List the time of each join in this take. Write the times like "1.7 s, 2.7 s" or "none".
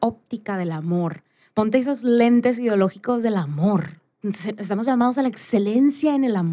1.5 s, 4.2 s